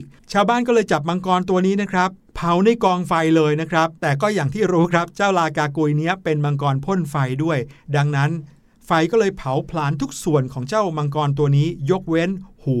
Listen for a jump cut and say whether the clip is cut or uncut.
cut